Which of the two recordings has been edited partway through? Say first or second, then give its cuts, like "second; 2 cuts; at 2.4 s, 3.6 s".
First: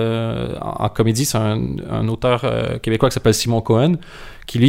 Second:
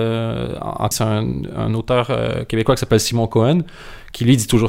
second; 1 cut; at 0.9 s